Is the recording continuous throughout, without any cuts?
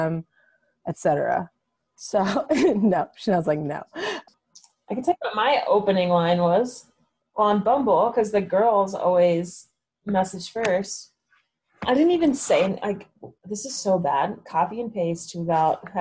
yes; 0 cuts

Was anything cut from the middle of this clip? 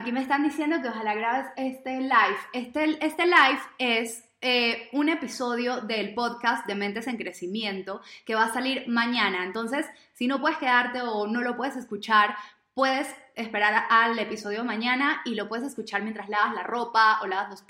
no; 0 cuts

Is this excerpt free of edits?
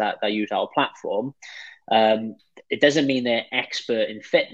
yes; 0 cuts

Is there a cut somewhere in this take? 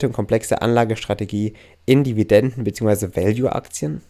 no; 0 cuts

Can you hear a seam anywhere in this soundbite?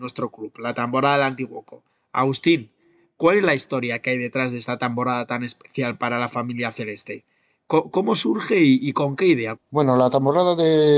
yes; 1 cut; at 9.6 s

